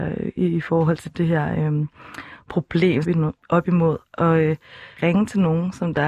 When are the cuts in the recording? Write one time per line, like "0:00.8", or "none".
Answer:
0:03.0
0:05.0